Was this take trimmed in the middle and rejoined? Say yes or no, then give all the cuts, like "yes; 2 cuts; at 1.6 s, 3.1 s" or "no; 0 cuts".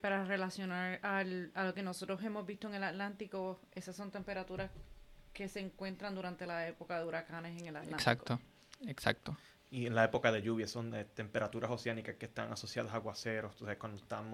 no; 0 cuts